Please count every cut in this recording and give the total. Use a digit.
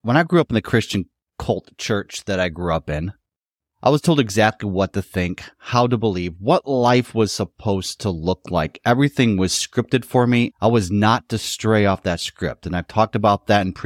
0